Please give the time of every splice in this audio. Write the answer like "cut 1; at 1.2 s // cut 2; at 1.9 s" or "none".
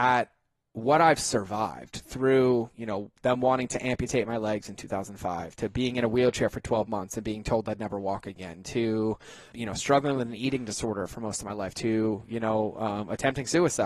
cut 1; at 9.5 s // cut 2; at 11.7 s